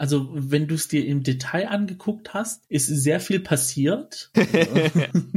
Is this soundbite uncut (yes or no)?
no